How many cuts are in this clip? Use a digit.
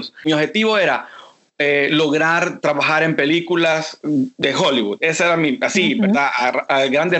0